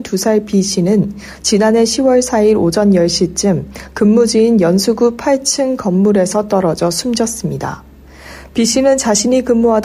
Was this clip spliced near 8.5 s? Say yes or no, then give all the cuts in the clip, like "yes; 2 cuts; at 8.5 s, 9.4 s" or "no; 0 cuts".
no; 0 cuts